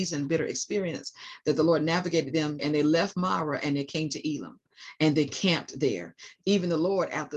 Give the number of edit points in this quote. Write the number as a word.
two